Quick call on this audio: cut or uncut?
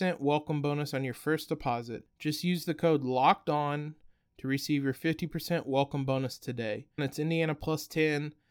cut